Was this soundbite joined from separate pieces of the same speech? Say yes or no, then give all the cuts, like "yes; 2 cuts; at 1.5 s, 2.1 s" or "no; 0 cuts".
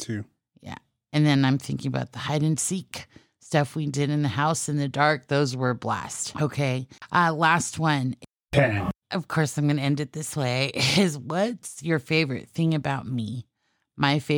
yes; 1 cut; at 6.3 s